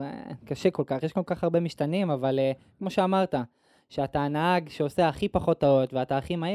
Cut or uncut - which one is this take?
uncut